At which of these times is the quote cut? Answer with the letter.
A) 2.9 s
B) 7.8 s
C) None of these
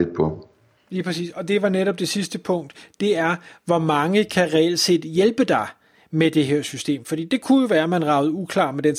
C